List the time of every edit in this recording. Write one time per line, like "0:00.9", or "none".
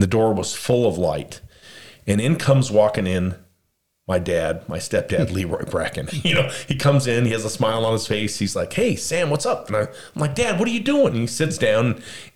0:06.1
0:11.1